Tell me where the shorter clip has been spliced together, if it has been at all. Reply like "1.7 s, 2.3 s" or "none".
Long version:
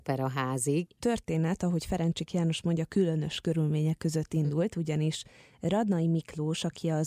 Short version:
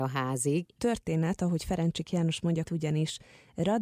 2.6 s

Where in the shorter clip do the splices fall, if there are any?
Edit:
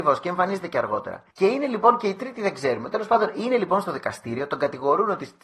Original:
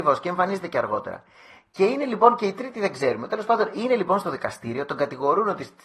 1.3 s

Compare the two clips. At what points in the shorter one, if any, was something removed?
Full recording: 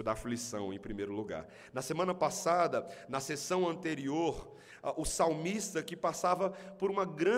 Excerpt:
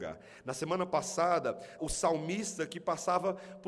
1.8 s

